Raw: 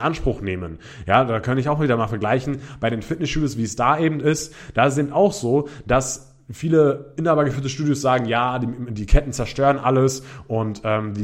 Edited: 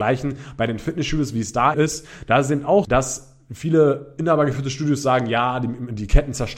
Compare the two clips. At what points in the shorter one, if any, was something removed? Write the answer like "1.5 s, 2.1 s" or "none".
1.7 s, 2.8 s